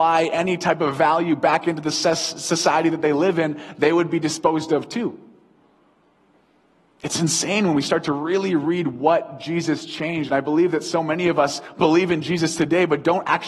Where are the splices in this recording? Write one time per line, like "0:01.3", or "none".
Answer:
none